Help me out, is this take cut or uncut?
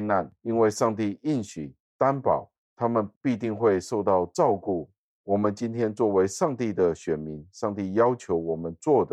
cut